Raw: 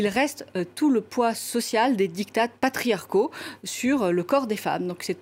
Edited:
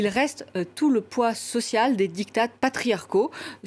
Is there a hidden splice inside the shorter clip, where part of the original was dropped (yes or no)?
no